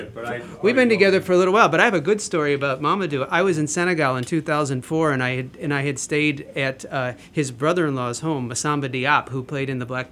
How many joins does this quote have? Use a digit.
0